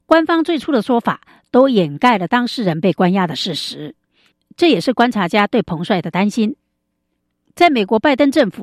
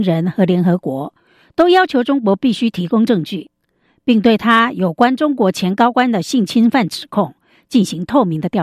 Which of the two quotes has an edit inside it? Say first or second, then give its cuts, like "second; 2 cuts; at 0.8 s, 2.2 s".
second; 1 cut; at 3.9 s